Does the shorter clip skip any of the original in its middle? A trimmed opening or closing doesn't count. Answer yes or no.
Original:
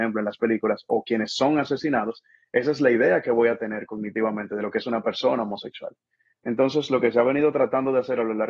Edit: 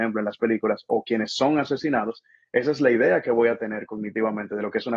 no